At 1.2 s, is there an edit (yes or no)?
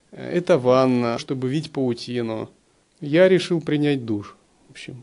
yes